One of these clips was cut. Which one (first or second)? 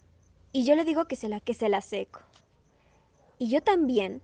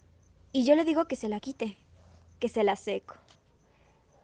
first